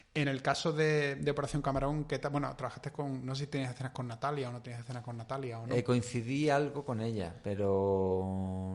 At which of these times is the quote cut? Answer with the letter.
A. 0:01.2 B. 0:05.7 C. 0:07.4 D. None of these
D